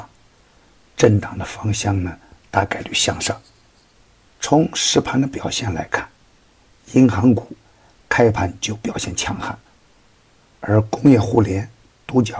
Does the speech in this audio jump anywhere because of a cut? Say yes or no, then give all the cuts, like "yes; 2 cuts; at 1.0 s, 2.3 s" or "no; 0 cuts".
no; 0 cuts